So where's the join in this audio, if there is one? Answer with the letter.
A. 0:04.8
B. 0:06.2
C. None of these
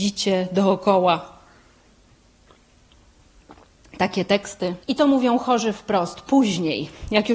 A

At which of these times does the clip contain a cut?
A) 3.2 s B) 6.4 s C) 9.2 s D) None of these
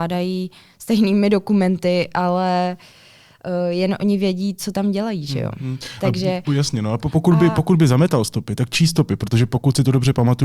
D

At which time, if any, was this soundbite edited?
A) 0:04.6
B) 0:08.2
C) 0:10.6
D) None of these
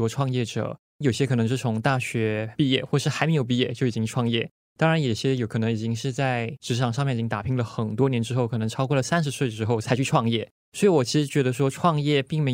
D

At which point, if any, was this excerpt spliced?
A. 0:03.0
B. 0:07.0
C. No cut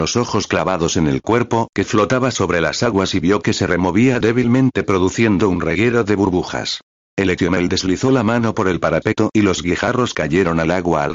B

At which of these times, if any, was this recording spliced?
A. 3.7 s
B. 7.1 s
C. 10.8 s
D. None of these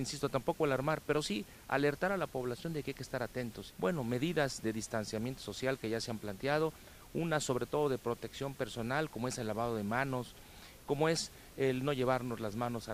A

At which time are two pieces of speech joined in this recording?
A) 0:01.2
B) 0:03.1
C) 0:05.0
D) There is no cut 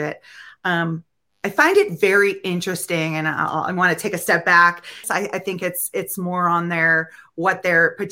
C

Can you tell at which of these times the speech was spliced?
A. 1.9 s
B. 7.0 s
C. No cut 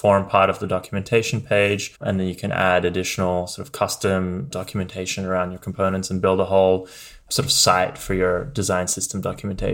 A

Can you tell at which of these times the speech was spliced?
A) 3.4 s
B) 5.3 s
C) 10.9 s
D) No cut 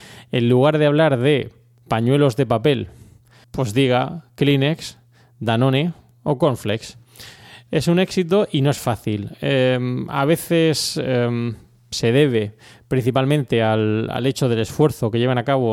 A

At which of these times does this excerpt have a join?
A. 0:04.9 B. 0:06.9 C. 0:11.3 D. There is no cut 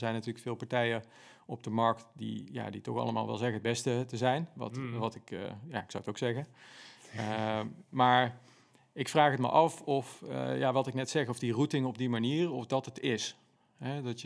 D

